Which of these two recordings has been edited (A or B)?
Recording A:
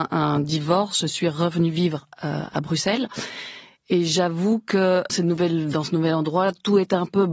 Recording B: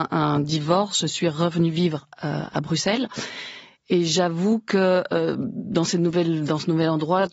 A